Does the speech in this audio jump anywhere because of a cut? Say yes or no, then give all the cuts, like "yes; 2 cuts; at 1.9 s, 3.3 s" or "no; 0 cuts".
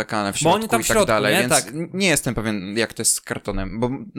no; 0 cuts